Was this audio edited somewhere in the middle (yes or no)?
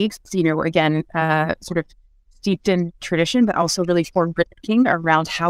yes